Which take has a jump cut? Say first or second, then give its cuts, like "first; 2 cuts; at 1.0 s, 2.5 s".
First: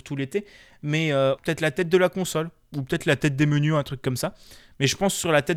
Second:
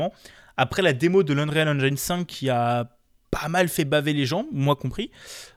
first; 1 cut; at 1.4 s